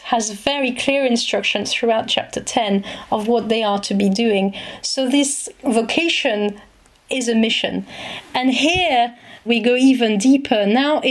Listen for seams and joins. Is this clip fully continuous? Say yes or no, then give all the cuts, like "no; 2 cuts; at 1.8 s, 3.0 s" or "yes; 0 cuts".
no; 1 cut; at 9.5 s